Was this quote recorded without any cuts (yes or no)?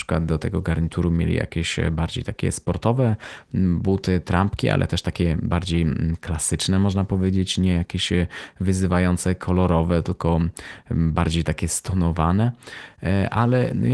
yes